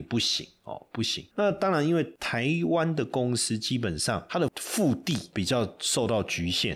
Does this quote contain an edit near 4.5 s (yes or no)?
yes